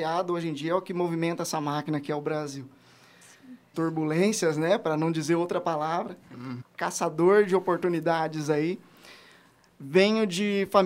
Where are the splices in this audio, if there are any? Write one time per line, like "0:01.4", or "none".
0:03.7
0:06.6